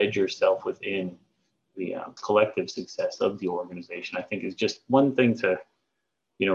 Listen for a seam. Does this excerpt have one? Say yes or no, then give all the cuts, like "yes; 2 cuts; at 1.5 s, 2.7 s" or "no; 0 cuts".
yes; 1 cut; at 2.2 s